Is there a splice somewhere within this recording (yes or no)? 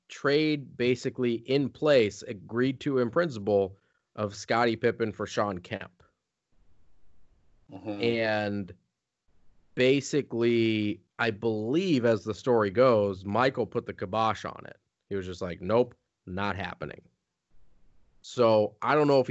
yes